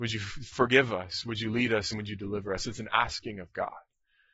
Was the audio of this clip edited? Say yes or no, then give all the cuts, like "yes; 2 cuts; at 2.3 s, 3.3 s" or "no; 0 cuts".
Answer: no; 0 cuts